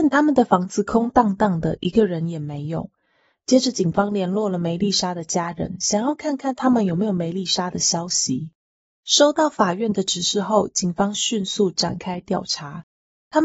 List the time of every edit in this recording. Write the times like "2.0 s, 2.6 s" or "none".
9.0 s